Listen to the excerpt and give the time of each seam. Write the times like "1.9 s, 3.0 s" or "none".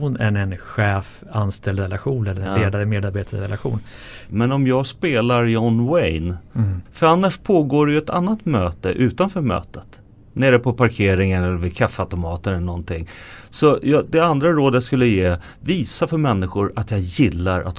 4.3 s, 6.9 s